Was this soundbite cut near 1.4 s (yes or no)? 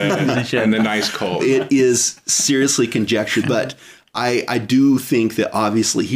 yes